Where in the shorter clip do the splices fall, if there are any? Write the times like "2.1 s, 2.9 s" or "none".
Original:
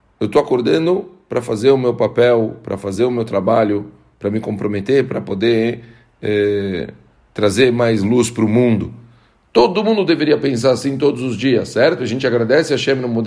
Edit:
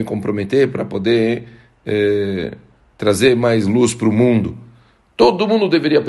none